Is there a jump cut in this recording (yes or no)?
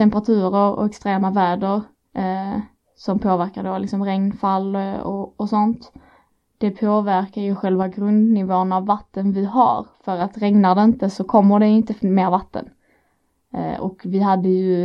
no